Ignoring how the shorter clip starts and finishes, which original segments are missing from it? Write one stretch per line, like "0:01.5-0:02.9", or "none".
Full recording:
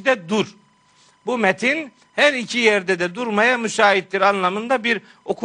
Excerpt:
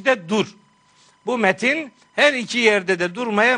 none